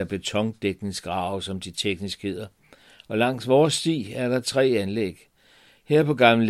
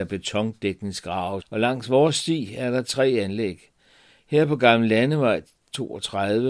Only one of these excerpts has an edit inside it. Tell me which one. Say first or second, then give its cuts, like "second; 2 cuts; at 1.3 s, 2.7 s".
second; 1 cut; at 1.4 s